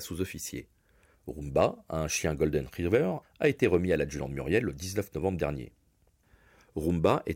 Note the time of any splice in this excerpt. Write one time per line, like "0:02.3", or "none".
0:01.1
0:03.2